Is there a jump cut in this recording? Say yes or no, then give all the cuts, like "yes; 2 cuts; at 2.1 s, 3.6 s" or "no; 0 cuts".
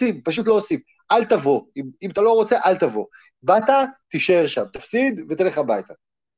no; 0 cuts